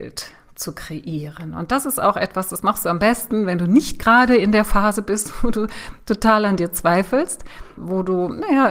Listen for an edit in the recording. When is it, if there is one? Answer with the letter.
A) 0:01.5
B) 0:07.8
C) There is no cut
B